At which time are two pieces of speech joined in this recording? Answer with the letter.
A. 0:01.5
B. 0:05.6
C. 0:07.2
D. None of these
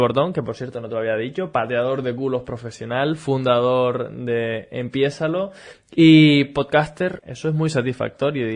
C